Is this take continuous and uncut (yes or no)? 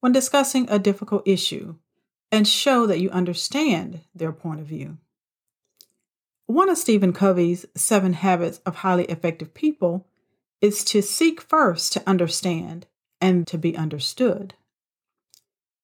no